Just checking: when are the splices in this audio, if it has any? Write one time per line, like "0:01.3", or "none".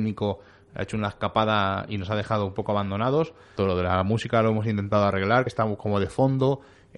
0:03.6
0:05.5